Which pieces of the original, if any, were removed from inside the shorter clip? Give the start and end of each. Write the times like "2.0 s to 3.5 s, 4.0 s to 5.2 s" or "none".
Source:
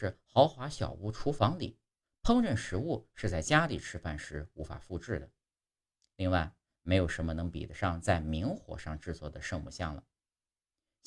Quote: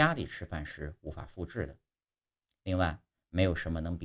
none